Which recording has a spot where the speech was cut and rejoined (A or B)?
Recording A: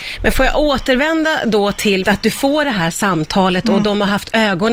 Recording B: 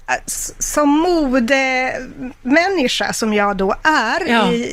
A